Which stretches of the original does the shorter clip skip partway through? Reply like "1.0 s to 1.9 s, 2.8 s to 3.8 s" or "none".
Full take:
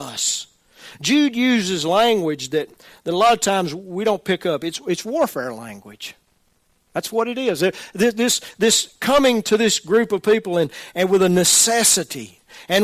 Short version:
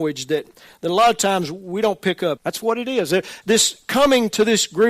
4.6 s to 6.9 s, 7.9 s to 8.5 s